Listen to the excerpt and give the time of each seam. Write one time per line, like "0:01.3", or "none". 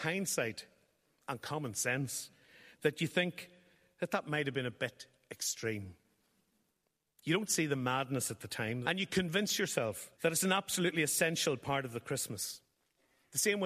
0:08.8
0:10.1